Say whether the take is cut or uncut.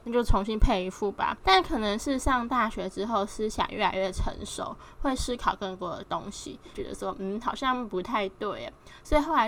cut